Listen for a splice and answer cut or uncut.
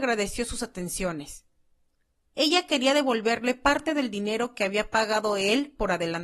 uncut